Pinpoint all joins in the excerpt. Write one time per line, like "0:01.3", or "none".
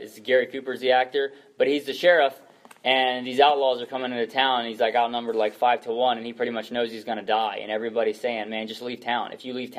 none

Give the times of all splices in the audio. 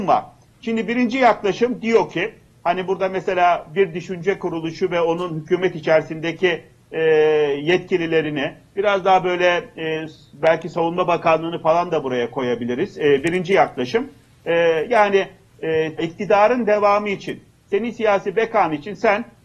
0:16.0

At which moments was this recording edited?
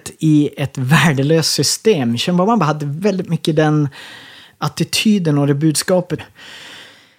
0:06.2

